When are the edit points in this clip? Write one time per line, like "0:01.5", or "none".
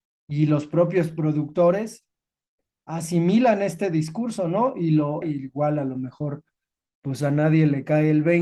0:05.2

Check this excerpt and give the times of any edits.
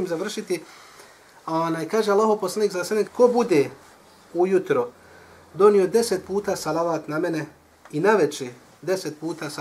0:03.1

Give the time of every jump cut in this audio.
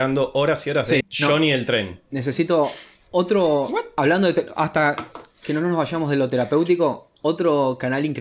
0:01.0

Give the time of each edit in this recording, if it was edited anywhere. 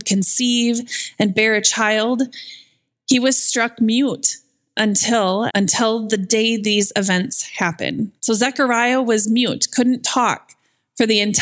0:05.5
0:08.2

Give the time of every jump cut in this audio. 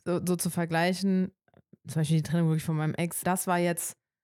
0:03.2

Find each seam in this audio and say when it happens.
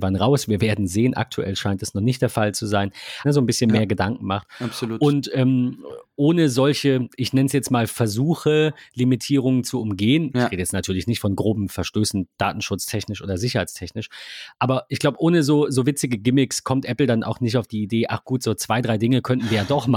0:03.2

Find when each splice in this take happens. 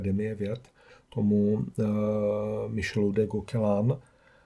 none

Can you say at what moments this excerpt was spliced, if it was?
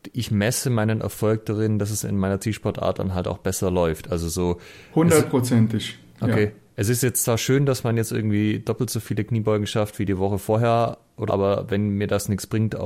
0:11.3

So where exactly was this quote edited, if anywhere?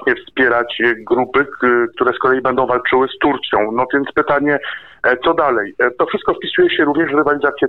none

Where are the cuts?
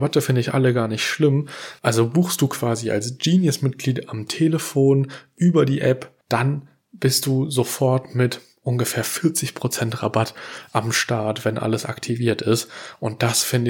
0:01.8
0:06.2

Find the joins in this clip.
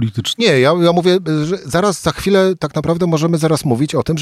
none

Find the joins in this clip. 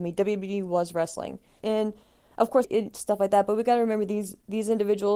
0:01.6
0:02.6

